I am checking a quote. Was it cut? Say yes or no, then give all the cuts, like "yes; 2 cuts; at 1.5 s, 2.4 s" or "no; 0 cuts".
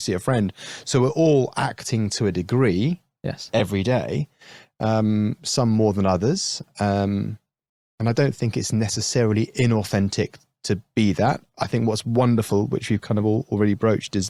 no; 0 cuts